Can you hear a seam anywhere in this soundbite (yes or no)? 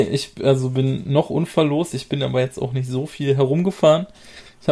no